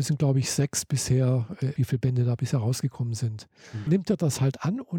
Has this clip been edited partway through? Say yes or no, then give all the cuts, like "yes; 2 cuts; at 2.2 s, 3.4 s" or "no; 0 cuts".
yes; 2 cuts; at 1.8 s, 3.9 s